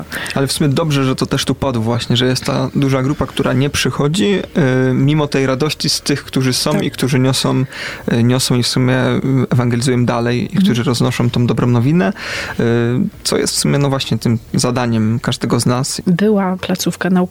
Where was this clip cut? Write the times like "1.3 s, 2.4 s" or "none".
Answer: 16.0 s